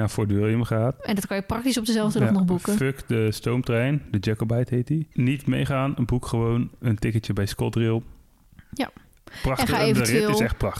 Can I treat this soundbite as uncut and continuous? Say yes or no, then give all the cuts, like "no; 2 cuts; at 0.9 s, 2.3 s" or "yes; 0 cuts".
no; 1 cut; at 5.1 s